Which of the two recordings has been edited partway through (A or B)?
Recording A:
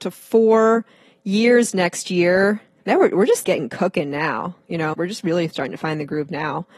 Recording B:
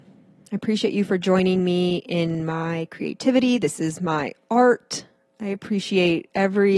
A